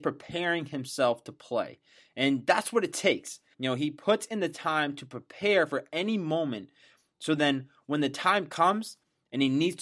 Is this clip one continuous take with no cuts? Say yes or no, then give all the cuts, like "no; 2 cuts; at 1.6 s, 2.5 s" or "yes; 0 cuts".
no; 1 cut; at 3.5 s